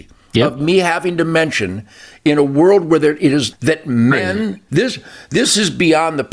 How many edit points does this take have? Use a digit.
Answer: 2